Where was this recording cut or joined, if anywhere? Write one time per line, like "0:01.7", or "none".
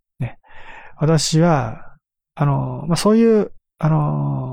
none